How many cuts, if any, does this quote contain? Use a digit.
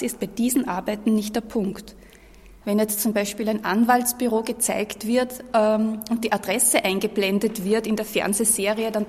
1